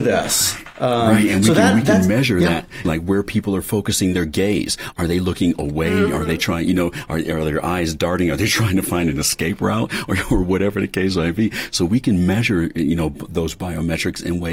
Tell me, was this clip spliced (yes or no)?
yes